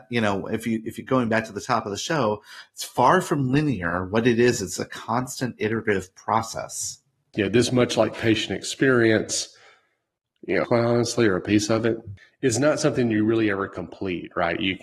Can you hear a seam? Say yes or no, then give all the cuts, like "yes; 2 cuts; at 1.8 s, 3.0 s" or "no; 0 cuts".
yes; 2 cuts; at 7.3 s, 10.6 s